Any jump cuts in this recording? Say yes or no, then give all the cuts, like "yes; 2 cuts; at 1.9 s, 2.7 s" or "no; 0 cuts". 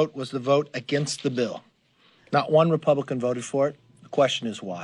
no; 0 cuts